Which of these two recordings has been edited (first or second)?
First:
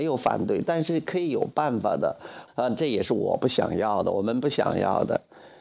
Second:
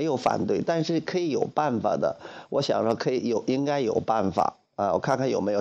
first